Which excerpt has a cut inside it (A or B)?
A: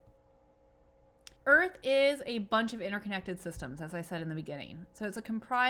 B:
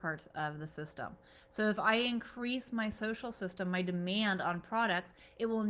A